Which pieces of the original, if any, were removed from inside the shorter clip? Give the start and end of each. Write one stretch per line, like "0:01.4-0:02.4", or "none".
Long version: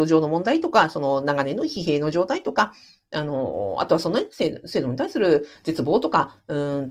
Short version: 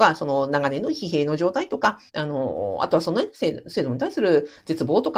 0:02.8-0:03.0